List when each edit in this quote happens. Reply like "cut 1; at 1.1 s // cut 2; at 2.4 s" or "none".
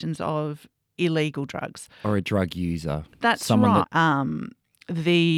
cut 1; at 3.8 s